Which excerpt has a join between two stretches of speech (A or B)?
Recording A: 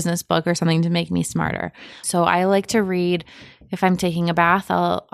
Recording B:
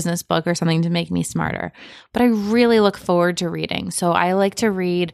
A